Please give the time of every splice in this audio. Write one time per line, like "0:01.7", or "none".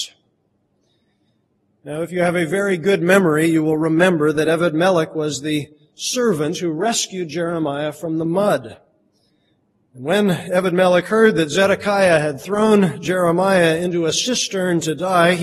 none